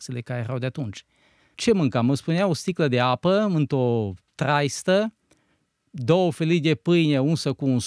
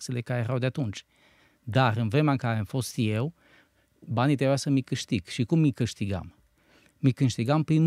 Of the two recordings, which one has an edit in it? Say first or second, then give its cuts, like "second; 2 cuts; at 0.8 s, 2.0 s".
first; 1 cut; at 1.5 s